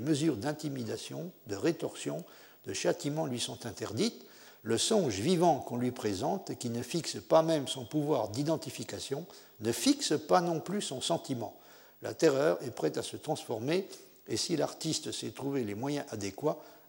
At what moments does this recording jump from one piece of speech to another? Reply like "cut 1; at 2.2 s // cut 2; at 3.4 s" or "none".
none